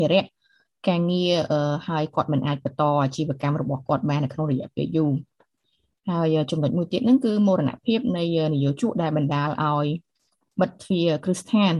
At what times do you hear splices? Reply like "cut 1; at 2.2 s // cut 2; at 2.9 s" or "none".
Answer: none